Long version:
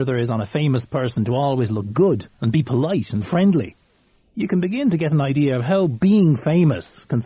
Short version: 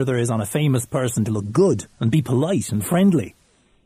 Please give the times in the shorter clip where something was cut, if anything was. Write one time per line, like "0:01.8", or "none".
0:01.3

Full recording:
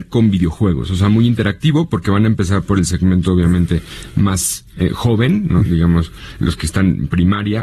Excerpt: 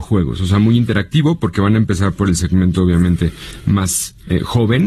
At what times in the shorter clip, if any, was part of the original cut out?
none

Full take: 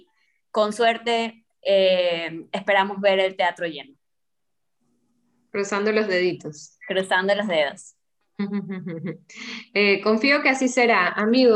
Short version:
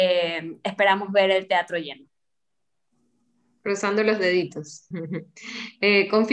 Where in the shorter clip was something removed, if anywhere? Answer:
0:04.9

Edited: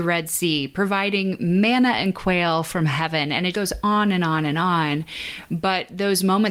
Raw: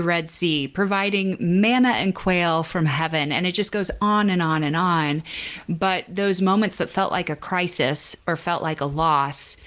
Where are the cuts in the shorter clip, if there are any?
0:03.5

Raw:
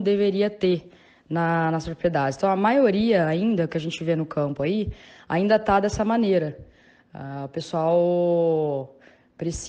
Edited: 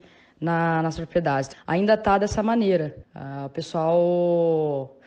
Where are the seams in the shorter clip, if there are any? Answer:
0:01.5
0:03.0

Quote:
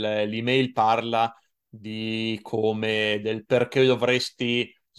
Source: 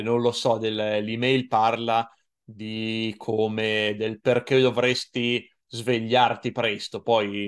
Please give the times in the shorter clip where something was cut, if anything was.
none

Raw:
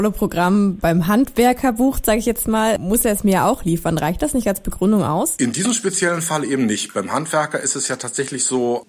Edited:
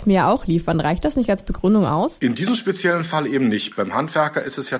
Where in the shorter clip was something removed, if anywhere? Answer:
none

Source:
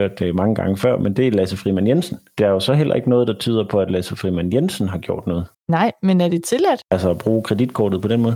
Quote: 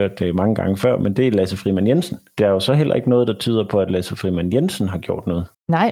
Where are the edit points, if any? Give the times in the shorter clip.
none

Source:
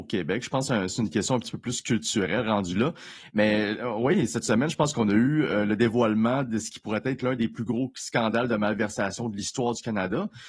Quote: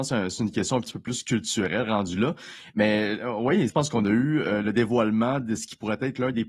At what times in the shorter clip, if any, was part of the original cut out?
0:03.7

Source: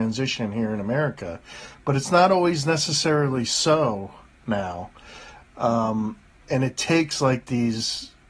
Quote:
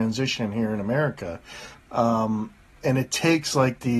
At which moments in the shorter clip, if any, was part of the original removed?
0:01.8

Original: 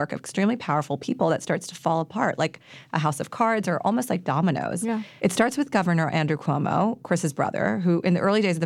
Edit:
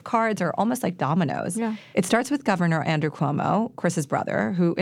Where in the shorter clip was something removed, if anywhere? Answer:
none

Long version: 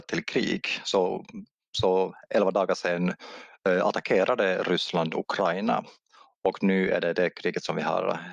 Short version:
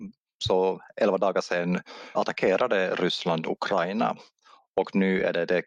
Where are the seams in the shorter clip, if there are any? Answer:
0:02.1

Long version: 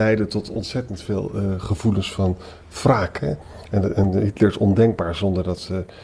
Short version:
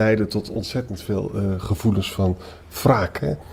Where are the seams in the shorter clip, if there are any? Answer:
none

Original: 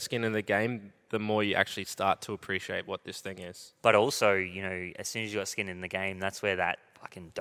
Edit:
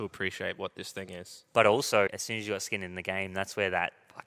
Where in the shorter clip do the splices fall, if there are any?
0:02.1

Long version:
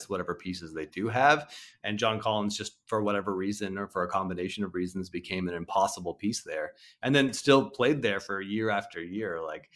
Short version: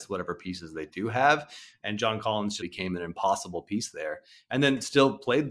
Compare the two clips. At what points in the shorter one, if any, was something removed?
0:02.6

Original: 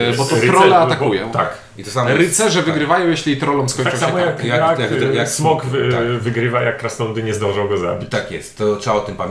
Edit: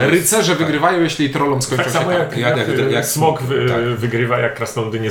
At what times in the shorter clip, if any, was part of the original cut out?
0:02.5

